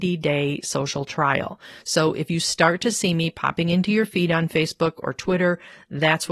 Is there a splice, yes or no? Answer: no